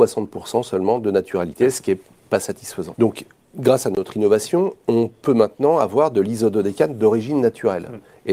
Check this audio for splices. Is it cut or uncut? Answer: cut